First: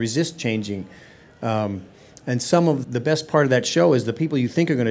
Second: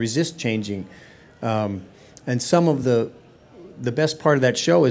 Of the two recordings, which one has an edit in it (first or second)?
first